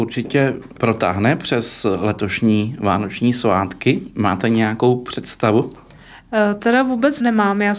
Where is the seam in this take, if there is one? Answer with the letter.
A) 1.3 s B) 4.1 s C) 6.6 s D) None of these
D